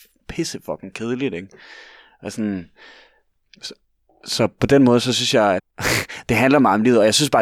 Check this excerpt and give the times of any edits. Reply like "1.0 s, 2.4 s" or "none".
5.6 s

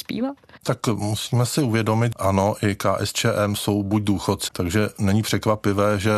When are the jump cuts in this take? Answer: 2.1 s, 4.5 s

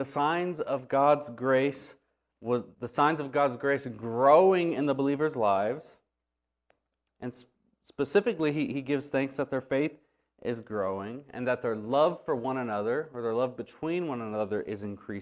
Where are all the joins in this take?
2.7 s

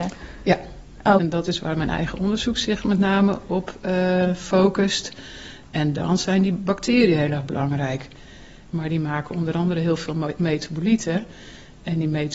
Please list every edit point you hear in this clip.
1.2 s, 8.7 s

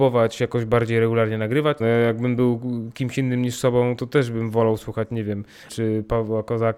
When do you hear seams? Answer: 1.8 s, 5.7 s

